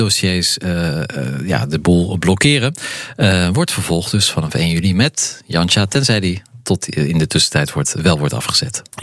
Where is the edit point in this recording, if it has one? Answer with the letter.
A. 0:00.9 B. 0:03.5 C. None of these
C